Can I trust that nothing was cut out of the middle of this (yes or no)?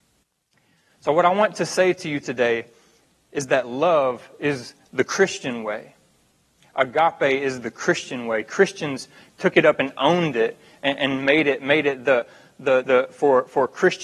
no